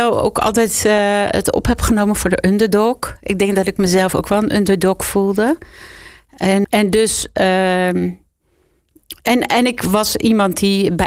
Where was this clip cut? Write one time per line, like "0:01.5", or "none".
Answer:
0:06.6